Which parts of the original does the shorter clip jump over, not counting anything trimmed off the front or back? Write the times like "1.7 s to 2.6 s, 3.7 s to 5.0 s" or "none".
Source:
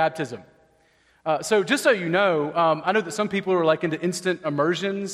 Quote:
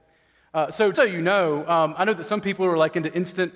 1.7 s to 1.8 s